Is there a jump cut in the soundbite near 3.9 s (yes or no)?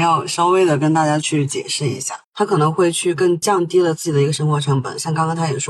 no